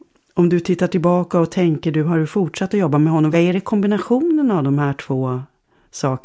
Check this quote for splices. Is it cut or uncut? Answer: cut